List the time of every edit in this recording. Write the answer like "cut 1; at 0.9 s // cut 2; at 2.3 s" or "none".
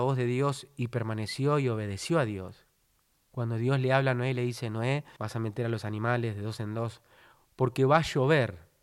cut 1; at 5.2 s